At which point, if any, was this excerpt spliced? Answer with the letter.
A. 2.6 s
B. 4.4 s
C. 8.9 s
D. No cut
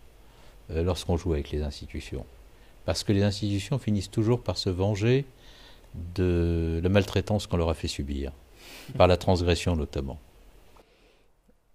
D